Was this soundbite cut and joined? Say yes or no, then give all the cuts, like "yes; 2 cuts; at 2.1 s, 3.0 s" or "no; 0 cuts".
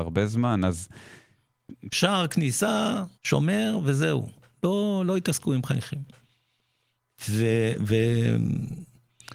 yes; 2 cuts; at 1.9 s, 3.1 s